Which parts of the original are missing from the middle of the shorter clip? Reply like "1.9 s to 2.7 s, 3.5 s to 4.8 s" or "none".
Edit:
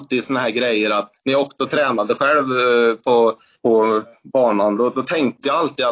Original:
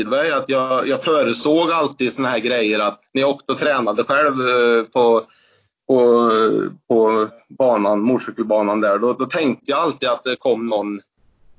5.4 s to 6.8 s, 8.0 s to 9.0 s

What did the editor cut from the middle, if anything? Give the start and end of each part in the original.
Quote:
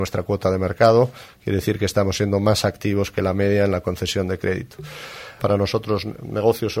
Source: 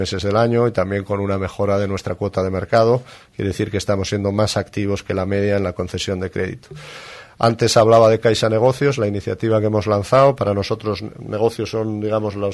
7.3 s to 10.4 s

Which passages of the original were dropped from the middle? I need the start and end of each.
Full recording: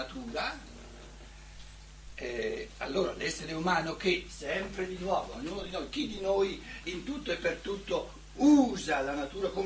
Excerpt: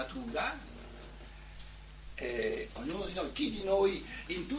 2.8 s to 5.3 s

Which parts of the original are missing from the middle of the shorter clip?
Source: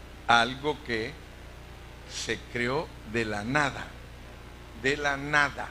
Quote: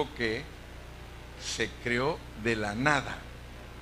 none

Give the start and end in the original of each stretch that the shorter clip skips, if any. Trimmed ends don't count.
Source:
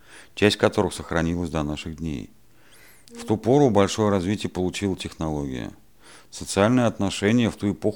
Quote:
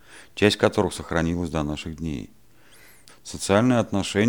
3.1 s to 6.2 s

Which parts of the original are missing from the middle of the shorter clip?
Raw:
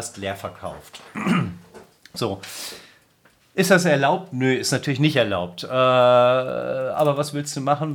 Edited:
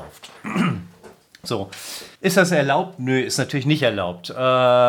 2.9 s to 3.5 s

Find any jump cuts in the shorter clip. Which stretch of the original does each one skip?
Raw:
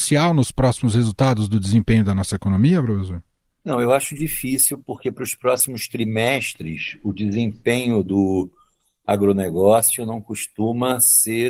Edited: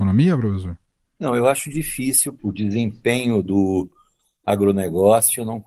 4.8 s to 7.0 s

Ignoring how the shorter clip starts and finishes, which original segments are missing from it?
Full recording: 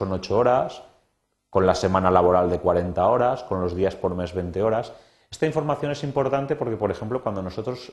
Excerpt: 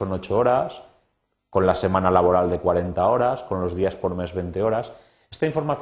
none

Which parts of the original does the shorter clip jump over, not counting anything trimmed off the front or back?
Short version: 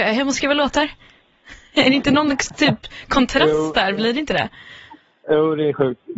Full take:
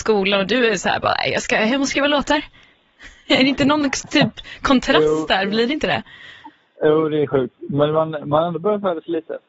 none

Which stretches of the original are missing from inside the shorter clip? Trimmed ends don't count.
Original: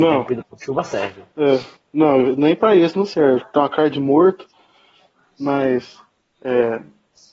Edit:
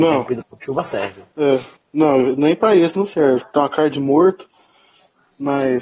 none

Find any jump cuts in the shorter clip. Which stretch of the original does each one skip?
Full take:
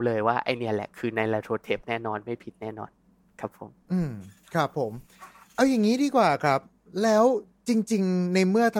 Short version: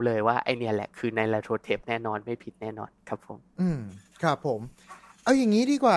3.0 s to 3.3 s

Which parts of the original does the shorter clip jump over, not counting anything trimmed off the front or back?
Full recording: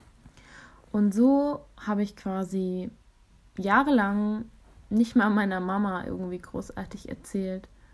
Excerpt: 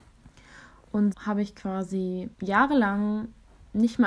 1.1 s to 1.7 s, 2.9 s to 3.5 s

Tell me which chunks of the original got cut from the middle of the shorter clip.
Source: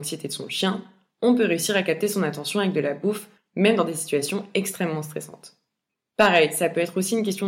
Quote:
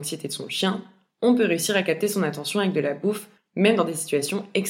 none

